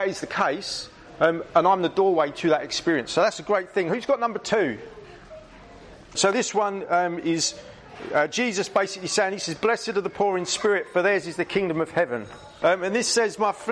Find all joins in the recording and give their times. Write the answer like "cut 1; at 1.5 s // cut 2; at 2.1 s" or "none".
cut 1; at 6.2 s // cut 2; at 12.6 s